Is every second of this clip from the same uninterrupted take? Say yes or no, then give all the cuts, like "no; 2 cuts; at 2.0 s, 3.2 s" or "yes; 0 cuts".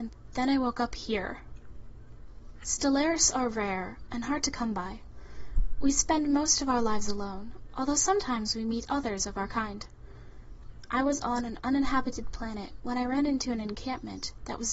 no; 1 cut; at 2.6 s